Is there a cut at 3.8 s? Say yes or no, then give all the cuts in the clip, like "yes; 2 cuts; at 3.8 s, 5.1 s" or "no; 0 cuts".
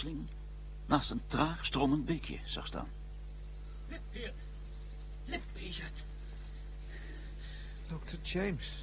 no; 1 cut; at 7.8 s